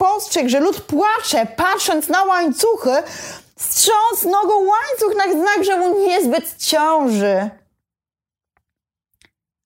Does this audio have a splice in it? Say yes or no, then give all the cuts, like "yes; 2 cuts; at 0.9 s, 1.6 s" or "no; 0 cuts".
no; 0 cuts